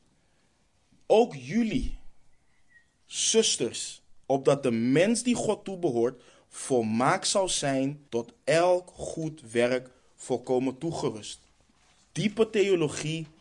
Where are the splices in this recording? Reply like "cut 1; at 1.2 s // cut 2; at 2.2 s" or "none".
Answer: cut 1; at 4.2 s // cut 2; at 8.1 s // cut 3; at 12.1 s